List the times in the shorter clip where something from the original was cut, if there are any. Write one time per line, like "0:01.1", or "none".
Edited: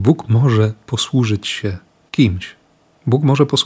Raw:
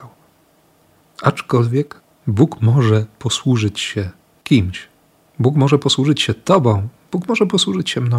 none